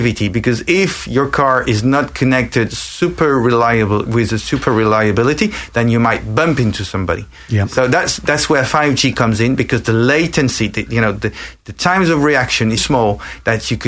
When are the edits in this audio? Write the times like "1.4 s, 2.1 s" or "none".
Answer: 12.8 s